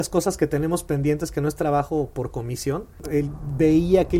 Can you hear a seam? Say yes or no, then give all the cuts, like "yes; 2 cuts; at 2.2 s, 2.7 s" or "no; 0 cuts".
yes; 1 cut; at 3.0 s